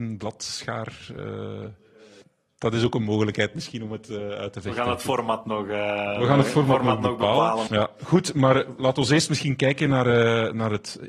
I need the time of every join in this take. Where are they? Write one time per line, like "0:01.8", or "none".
0:07.7